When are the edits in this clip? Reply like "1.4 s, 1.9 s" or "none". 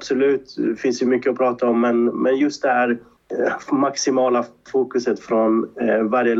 none